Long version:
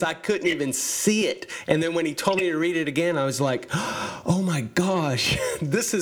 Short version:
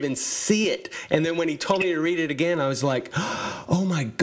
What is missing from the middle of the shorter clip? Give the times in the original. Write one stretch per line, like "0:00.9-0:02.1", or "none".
none